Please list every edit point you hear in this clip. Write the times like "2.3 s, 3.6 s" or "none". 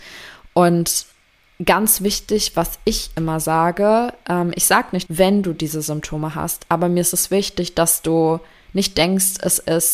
5.1 s

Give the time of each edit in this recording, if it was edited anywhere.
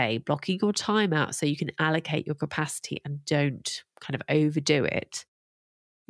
none

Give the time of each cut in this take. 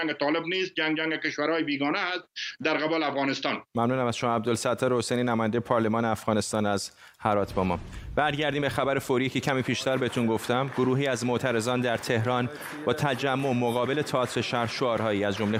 3.7 s

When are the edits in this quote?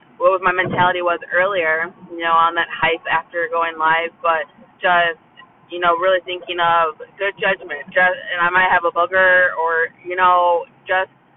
7.9 s

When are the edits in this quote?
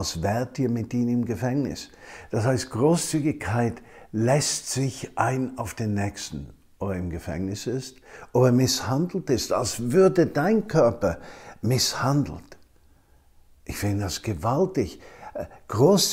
none

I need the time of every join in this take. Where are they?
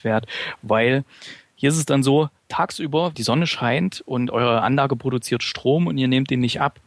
3.1 s

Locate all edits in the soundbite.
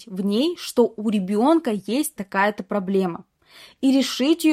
2.2 s

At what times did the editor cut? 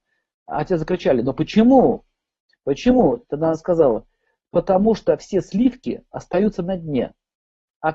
none

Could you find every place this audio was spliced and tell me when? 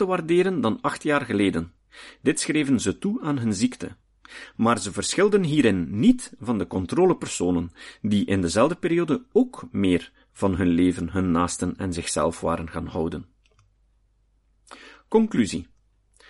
none

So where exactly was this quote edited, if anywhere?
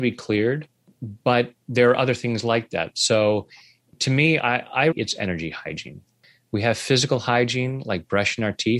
4.9 s

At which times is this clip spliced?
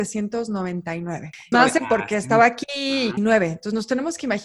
1.5 s, 3.2 s

